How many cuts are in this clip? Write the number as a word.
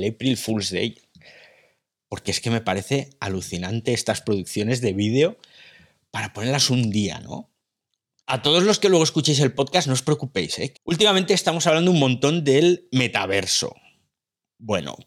two